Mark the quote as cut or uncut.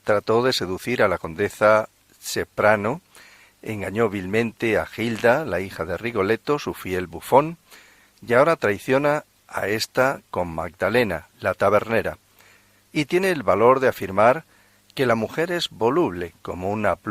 uncut